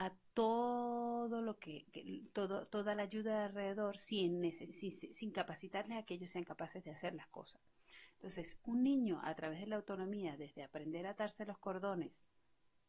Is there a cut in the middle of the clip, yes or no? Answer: yes